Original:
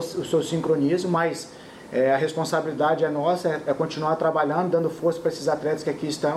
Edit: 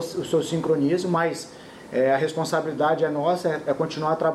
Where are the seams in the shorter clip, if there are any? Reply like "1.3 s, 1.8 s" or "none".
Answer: none